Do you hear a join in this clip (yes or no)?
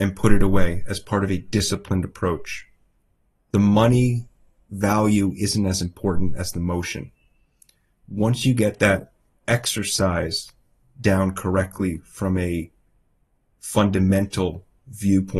no